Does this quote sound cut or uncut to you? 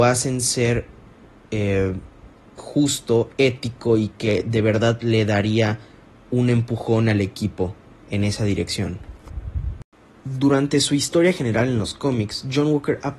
cut